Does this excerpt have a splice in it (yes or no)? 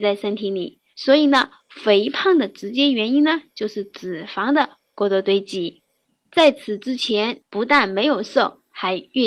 yes